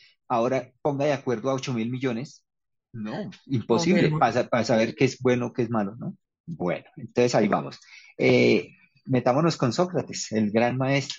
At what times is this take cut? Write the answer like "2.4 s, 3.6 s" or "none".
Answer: none